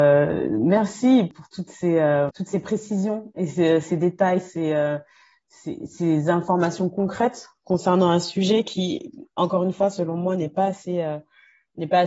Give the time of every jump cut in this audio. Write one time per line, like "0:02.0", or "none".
none

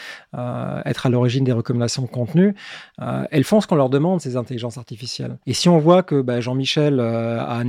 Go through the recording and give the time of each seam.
0:05.4

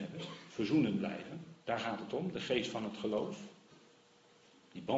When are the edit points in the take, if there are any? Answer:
0:01.6

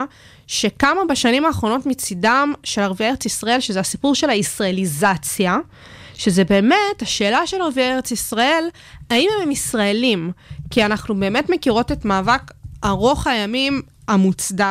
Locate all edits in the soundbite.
none

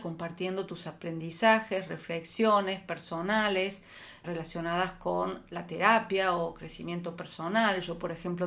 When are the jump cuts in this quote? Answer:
0:04.2

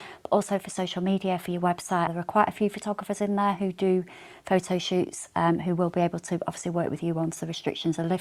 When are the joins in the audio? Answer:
0:02.1

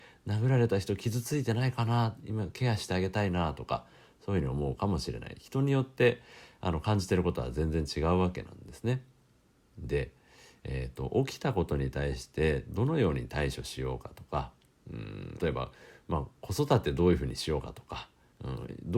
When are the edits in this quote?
0:15.4

